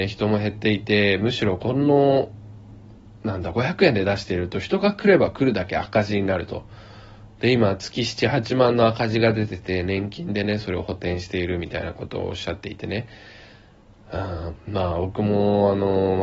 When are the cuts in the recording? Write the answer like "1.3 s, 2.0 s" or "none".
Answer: 7.3 s